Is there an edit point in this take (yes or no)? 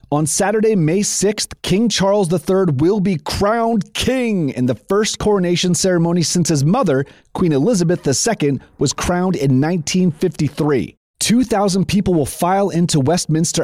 no